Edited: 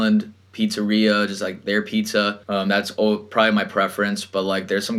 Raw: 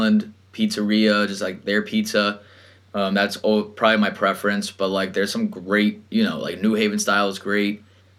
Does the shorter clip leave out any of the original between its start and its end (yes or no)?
yes